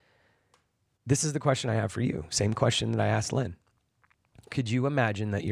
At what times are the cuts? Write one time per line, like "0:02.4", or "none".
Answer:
none

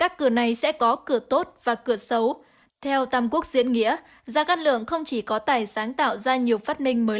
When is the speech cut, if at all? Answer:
0:02.7

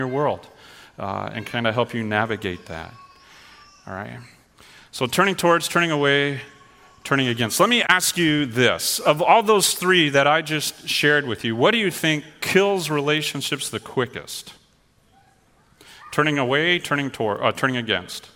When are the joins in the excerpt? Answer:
0:01.3

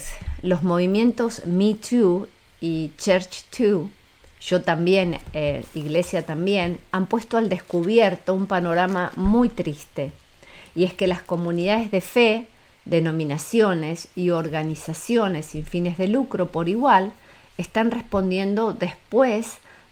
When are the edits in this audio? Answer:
none

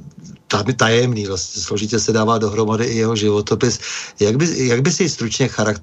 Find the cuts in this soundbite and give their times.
none

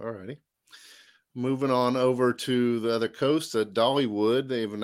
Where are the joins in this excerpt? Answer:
none

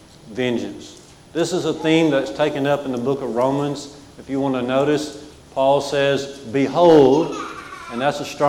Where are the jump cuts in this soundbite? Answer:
0:05.3

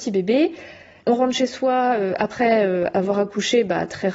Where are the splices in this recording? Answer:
0:01.0

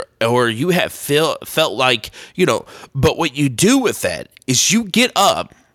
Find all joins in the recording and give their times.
none

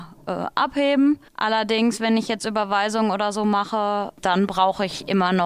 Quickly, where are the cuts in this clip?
0:01.3

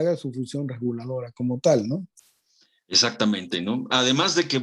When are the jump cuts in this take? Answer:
none

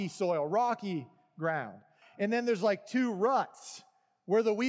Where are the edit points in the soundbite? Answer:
0:02.0

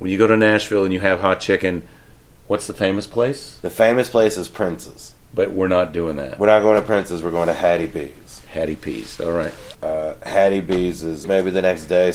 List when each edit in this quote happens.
0:09.7
0:11.2

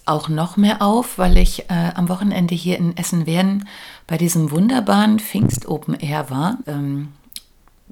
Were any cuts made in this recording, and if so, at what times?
0:06.6

